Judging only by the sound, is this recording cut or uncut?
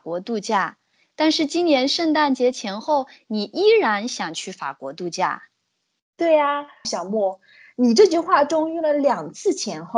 cut